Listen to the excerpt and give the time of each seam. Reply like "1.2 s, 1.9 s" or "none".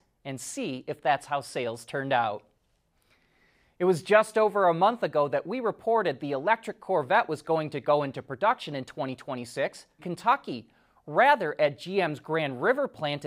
10.0 s